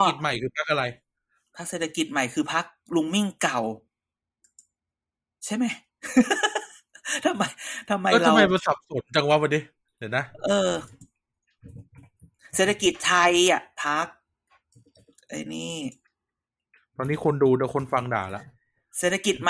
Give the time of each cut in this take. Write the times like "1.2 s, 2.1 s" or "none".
none

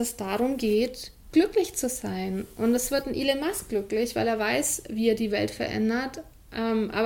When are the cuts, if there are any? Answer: none

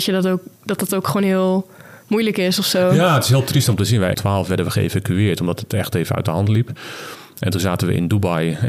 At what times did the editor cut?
4.1 s

